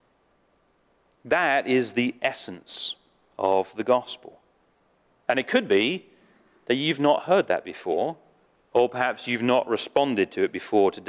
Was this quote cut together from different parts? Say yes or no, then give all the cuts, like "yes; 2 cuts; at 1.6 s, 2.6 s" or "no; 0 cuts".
no; 0 cuts